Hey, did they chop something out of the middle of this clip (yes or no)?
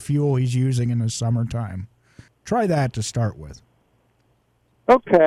yes